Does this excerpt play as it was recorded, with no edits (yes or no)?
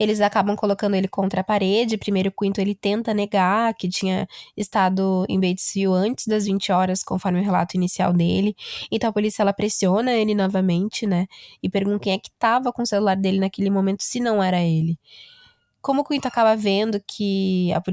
no